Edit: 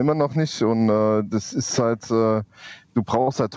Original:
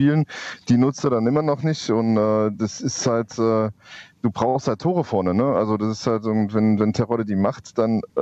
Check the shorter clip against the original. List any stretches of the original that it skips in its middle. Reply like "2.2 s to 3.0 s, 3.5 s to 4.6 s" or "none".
none